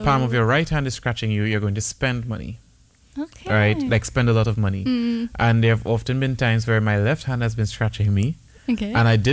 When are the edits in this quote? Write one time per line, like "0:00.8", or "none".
none